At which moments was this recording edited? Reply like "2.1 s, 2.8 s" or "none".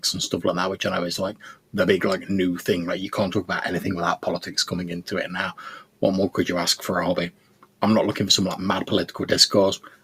5.9 s